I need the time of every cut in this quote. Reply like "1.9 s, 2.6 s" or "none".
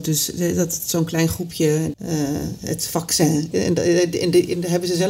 1.9 s, 3.5 s